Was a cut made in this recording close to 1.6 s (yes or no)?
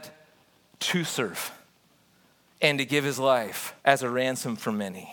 no